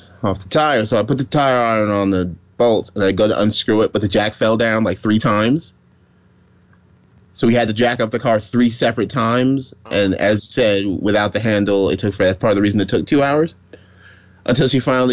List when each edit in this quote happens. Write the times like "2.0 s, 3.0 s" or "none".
none